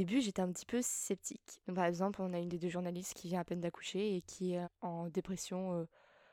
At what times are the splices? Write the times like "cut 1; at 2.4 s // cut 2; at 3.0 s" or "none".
cut 1; at 1.6 s // cut 2; at 4.6 s